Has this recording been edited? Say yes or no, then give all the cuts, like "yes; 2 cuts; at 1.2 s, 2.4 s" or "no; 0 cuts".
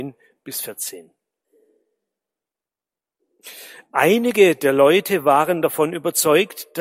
no; 0 cuts